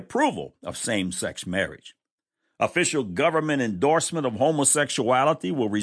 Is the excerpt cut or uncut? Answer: uncut